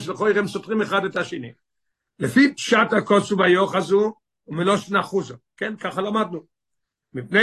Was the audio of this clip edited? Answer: yes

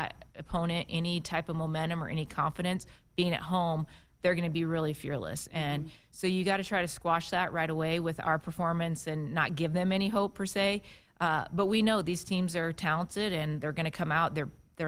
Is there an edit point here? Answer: no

